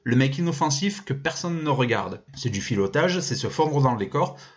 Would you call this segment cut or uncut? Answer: cut